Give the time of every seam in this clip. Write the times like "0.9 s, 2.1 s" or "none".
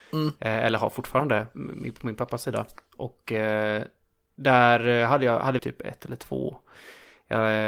5.6 s